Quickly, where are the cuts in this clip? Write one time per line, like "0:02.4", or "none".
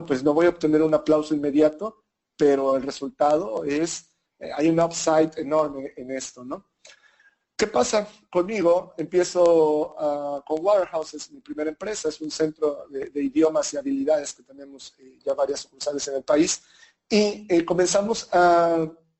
none